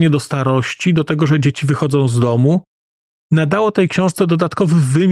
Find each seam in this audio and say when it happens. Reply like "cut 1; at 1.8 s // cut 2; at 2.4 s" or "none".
none